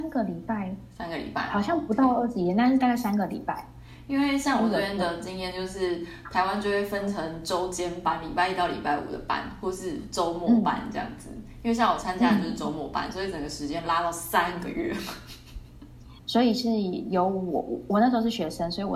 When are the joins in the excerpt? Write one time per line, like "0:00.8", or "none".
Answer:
0:16.2